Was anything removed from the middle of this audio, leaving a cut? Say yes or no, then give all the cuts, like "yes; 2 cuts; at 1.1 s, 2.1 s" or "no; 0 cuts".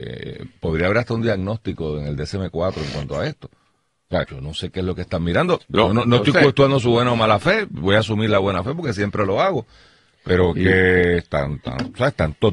yes; 1 cut; at 4.2 s